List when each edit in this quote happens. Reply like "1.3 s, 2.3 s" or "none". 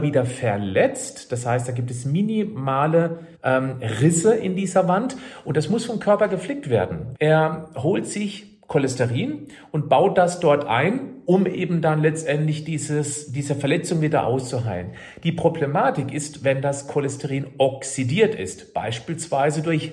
3.3 s, 7.1 s